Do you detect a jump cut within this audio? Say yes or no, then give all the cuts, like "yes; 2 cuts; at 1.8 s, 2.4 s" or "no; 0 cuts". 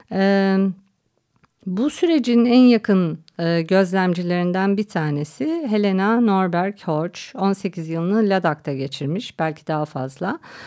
no; 0 cuts